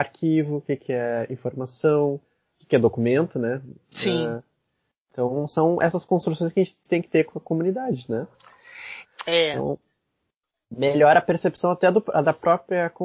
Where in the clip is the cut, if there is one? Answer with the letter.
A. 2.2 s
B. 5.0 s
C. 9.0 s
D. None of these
C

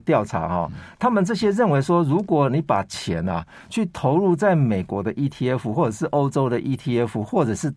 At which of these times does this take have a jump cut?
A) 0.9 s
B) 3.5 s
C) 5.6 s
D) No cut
A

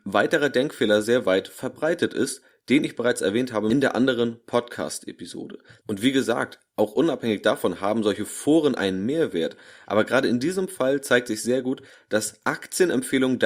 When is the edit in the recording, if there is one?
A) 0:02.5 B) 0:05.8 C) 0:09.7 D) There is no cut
B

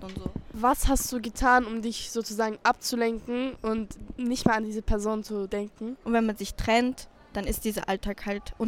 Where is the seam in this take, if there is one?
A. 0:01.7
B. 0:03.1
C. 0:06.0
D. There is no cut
C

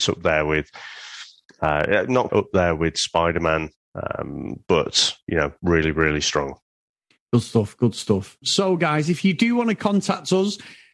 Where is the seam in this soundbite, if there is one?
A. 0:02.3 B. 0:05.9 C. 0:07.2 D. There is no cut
A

